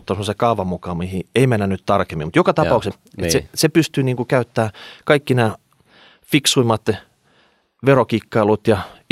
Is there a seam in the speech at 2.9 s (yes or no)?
yes